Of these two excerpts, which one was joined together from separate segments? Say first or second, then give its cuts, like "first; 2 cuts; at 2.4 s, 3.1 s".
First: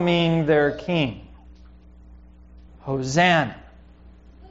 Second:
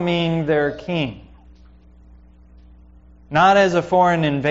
first; 1 cut; at 2.7 s